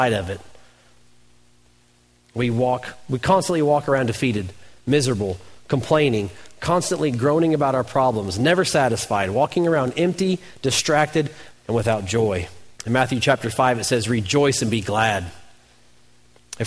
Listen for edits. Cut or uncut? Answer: cut